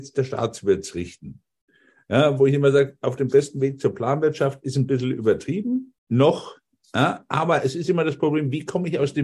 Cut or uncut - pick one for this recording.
cut